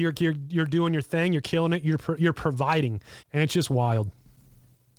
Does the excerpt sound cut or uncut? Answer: cut